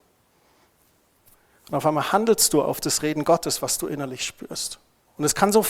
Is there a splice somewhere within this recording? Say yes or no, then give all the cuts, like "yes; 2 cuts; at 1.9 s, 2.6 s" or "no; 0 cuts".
no; 0 cuts